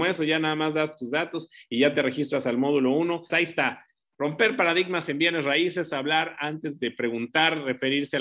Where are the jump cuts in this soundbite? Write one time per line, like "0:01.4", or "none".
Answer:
0:03.3